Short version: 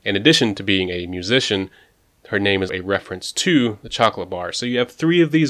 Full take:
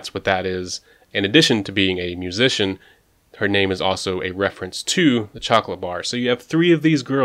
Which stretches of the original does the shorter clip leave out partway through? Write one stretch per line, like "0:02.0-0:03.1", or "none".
0:03.8-0:04.2